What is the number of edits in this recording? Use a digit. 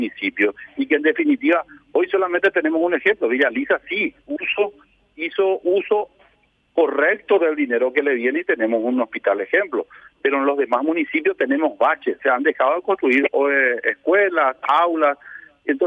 1